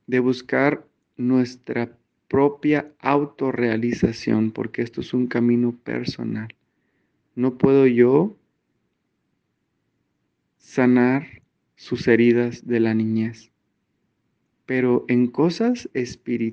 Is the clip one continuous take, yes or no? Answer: no